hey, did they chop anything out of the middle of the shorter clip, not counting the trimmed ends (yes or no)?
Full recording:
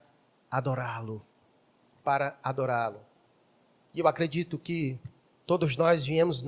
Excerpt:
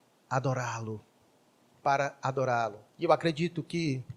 yes